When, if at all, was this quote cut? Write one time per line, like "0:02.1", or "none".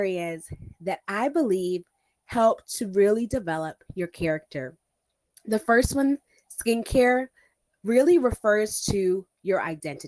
none